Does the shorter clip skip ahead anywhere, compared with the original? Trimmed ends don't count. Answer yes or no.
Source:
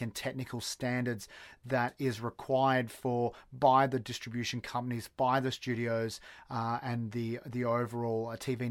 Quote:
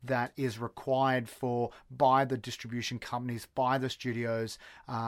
no